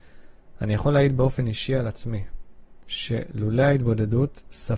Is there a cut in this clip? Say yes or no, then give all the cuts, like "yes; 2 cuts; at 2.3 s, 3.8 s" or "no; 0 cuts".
no; 0 cuts